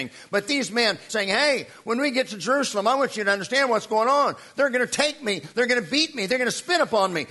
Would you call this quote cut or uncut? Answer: cut